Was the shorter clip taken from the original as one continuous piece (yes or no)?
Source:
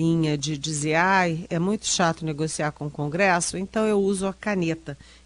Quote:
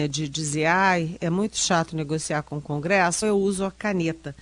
no